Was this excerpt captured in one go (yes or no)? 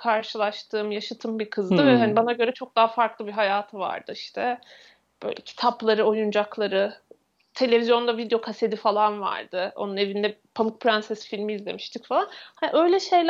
yes